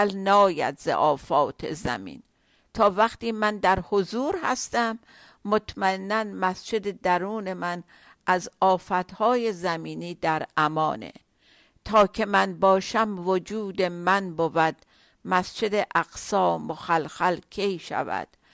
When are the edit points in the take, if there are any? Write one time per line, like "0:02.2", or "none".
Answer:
none

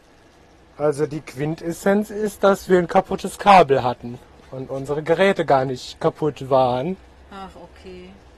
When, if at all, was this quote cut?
none

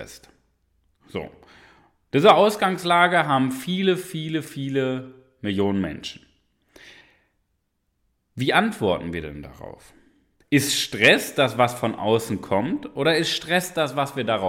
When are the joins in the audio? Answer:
0:10.4

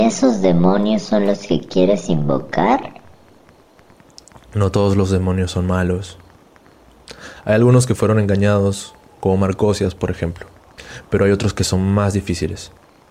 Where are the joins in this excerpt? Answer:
none

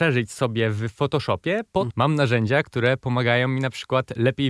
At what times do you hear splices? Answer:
0:01.9

